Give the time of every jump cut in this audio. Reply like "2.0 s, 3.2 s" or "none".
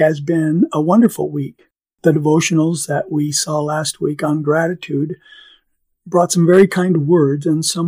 none